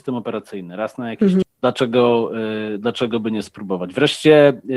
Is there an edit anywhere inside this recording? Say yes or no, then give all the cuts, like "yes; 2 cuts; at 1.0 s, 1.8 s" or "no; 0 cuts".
yes; 1 cut; at 1.4 s